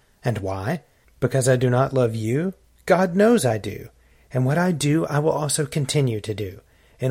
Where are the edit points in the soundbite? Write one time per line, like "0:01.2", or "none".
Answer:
none